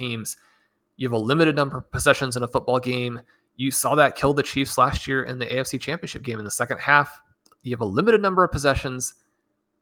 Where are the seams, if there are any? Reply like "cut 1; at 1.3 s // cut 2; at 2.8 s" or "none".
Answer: none